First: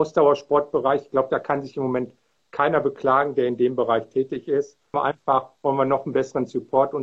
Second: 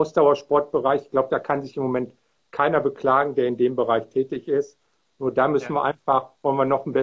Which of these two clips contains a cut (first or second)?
first